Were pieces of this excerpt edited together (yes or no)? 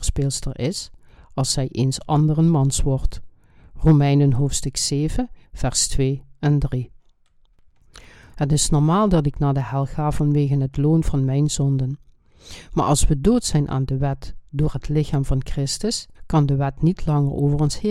yes